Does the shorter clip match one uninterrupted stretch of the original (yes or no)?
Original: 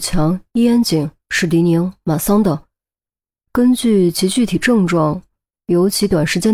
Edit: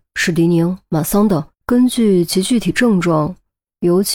no